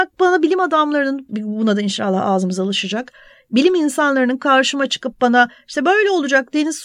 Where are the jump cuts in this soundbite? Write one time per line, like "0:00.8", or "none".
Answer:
0:01.3